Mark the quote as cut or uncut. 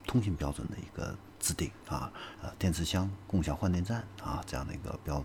cut